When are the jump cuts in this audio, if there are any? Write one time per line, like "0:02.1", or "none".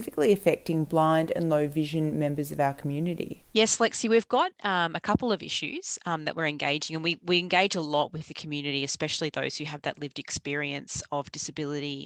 0:03.5